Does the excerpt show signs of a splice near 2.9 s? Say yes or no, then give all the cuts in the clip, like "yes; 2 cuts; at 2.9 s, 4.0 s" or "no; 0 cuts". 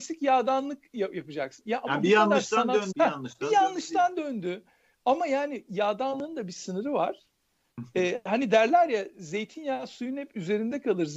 yes; 1 cut; at 2.9 s